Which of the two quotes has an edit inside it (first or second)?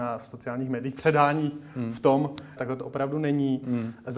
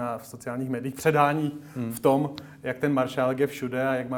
first